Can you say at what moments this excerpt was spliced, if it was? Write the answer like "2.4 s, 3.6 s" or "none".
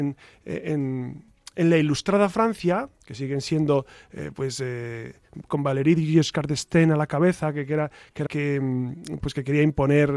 3.0 s, 8.3 s